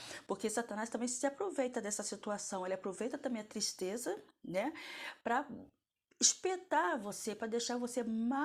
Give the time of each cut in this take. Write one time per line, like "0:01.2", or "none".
none